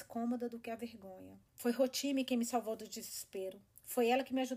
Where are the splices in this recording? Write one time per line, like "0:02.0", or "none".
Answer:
0:01.5

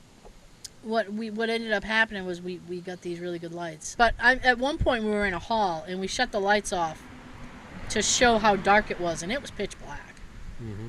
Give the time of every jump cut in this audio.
0:04.0

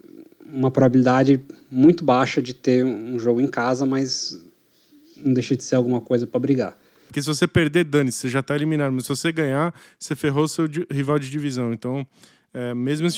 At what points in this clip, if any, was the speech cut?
0:07.1

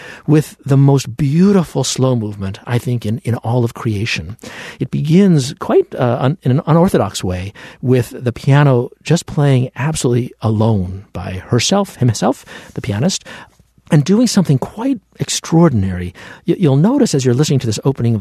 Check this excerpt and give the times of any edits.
none

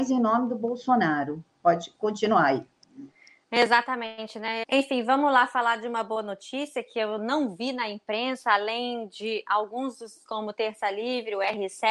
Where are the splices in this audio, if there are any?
0:04.6
0:10.3

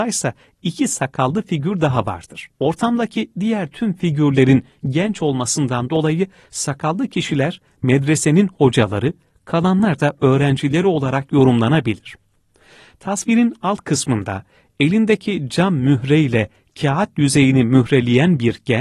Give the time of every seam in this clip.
0:02.5

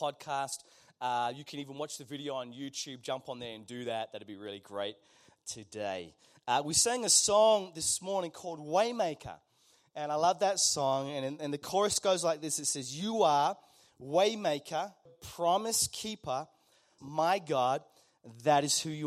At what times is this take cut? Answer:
0:15.1
0:17.0

